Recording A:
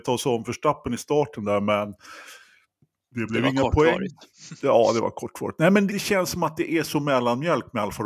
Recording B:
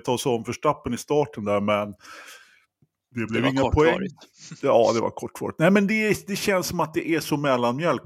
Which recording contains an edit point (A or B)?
A